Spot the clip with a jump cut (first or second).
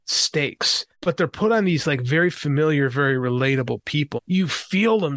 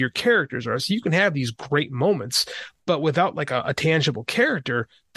first